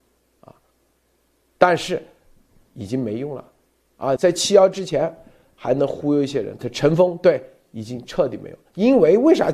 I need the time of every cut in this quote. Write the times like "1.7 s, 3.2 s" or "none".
4.2 s, 6.6 s